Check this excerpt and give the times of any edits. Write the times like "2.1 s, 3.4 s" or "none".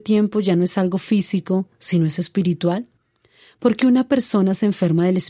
none